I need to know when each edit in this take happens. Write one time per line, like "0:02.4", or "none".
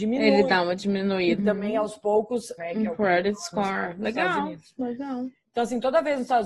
0:01.4
0:02.6